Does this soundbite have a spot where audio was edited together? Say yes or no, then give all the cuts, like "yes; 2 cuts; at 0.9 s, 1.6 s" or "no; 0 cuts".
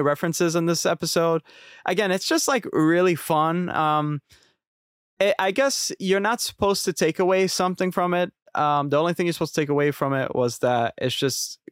no; 0 cuts